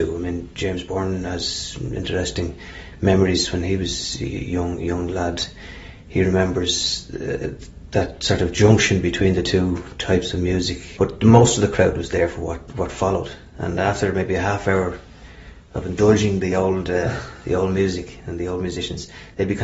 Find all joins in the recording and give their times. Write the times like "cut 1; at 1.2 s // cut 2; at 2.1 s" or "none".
cut 1; at 11.0 s